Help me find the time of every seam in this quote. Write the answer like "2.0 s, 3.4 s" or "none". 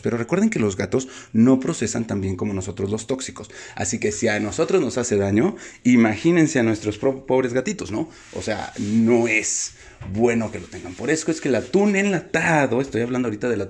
none